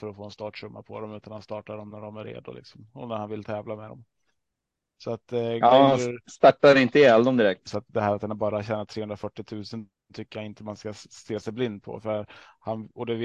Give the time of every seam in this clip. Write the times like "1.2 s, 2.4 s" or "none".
7.7 s